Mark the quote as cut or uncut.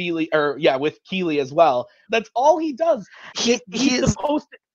cut